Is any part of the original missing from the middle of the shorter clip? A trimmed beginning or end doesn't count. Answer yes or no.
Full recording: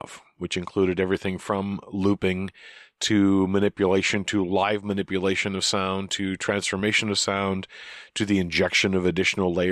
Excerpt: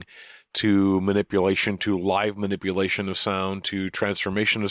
no